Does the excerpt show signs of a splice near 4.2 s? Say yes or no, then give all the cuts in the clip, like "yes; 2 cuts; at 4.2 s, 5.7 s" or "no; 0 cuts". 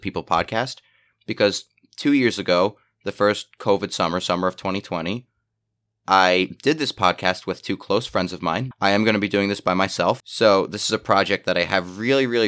no; 2 cuts; at 8.7 s, 10.2 s